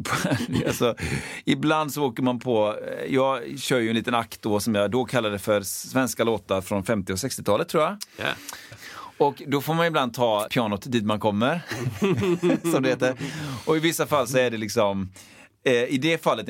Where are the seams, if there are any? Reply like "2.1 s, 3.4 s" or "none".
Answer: 8.7 s, 10.5 s